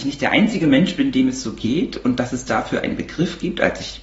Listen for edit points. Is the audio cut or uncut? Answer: uncut